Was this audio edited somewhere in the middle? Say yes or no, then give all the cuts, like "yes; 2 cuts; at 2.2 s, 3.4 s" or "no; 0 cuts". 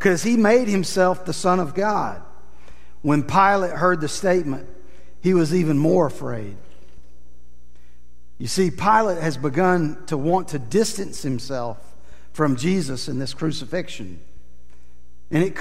no; 0 cuts